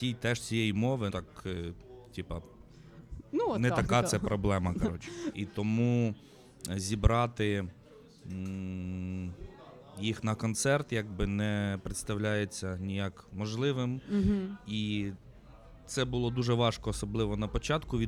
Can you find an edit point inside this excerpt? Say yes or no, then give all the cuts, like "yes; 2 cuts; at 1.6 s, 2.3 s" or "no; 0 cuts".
yes; 2 cuts; at 1.1 s, 5.3 s